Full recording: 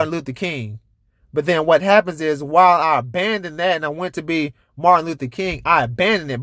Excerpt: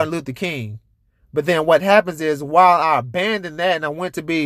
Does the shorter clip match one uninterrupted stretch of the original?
yes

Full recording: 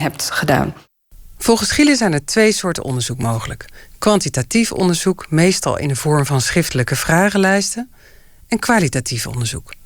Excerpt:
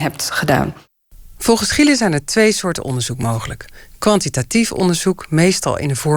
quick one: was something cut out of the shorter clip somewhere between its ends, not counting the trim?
no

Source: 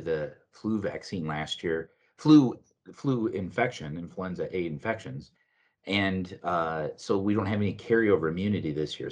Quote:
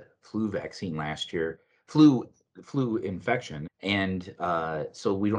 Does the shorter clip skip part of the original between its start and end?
yes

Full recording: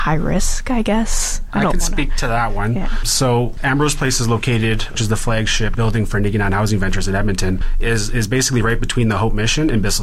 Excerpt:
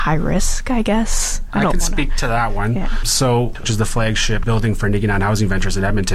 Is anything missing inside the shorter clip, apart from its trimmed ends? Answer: yes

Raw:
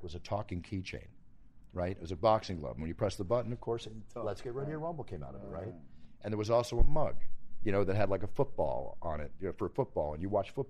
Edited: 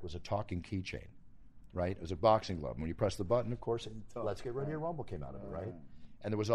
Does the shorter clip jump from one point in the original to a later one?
no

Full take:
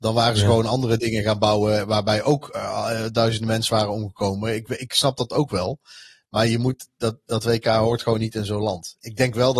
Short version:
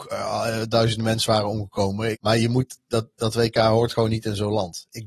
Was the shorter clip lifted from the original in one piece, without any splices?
no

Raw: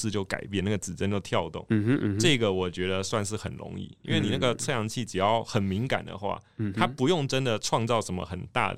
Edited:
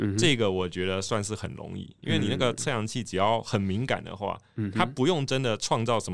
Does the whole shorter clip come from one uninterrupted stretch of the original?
yes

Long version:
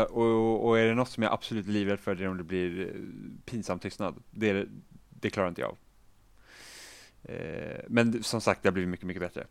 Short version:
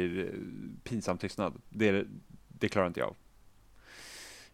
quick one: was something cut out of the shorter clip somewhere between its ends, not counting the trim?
no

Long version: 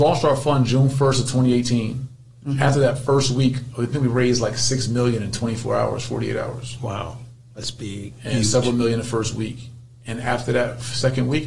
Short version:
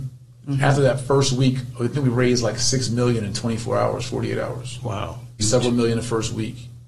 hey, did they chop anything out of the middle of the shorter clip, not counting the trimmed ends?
yes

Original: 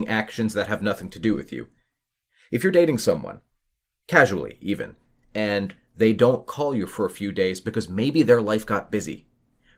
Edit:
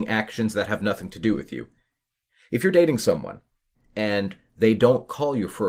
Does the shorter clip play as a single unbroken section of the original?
no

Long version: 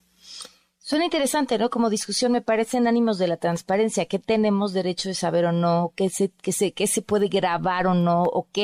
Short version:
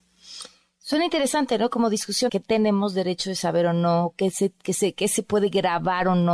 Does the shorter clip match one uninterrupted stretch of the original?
no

